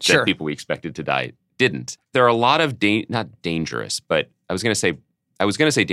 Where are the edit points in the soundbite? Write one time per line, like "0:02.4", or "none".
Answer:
0:02.0